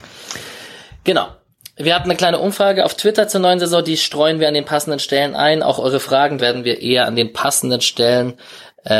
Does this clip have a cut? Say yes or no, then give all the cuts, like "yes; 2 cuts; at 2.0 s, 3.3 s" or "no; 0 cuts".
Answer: yes; 1 cut; at 6.4 s